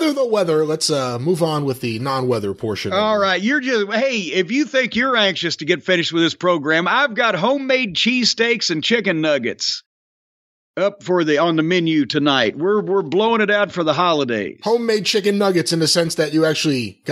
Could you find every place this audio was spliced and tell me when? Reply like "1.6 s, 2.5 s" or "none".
none